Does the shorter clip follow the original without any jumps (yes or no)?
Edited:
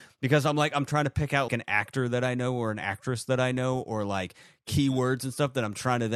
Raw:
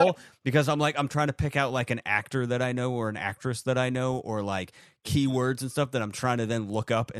no